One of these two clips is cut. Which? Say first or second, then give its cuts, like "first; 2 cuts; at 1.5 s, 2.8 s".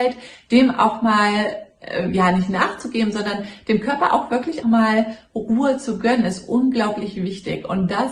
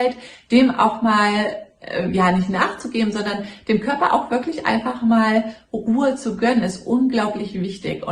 first; 1 cut; at 4.6 s